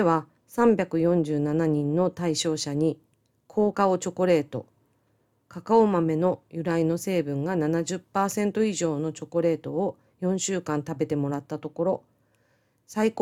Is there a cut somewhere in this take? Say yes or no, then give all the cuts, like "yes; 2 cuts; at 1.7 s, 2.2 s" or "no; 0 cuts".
yes; 1 cut; at 3.7 s